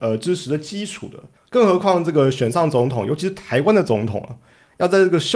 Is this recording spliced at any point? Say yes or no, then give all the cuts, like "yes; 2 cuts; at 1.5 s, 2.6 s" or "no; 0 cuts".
yes; 1 cut; at 1.4 s